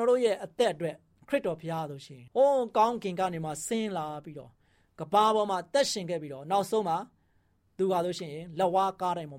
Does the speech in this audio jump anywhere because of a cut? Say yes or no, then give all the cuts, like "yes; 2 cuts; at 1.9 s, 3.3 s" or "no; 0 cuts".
yes; 1 cut; at 2.3 s